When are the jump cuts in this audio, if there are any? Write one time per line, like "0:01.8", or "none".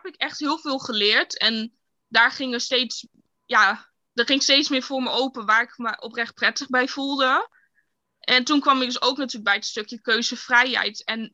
none